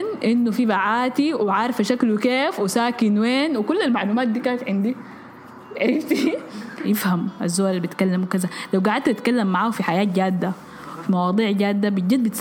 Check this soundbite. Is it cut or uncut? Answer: cut